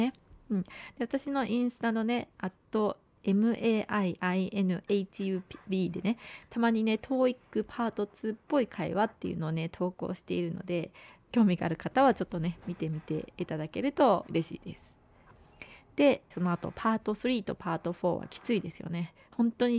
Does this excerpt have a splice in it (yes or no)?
yes